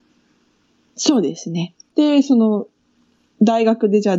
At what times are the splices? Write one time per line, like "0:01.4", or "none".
0:01.9